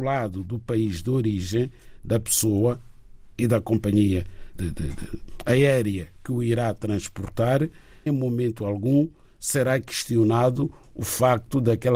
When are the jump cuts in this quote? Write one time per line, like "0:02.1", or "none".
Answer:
0:04.5
0:08.1